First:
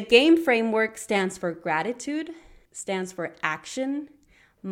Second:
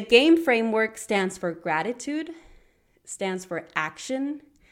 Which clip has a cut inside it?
first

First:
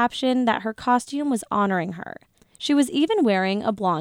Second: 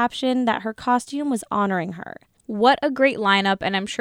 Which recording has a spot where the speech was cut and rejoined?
second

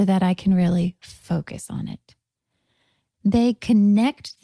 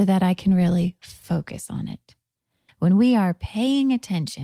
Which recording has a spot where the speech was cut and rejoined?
second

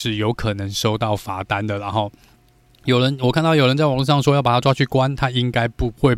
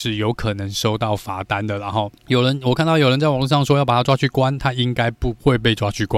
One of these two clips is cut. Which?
second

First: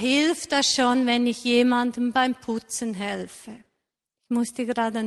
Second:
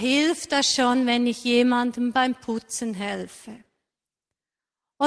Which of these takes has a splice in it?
first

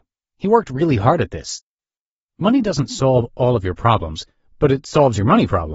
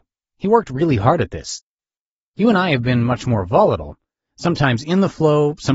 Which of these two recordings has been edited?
first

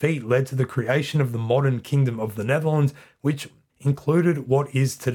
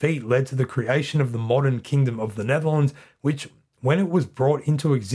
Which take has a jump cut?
first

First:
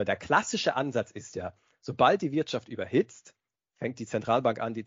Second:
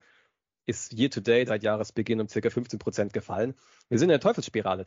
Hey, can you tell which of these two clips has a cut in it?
second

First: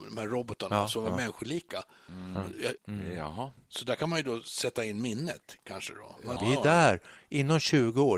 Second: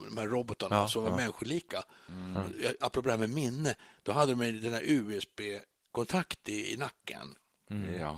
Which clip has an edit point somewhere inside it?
first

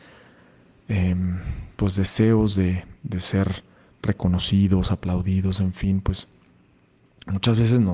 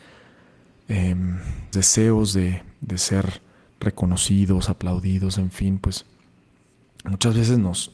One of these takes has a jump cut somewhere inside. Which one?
second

